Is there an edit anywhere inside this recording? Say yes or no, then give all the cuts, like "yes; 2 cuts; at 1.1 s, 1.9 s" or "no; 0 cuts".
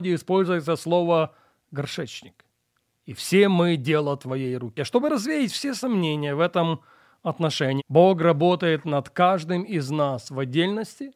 yes; 2 cuts; at 4.8 s, 7.8 s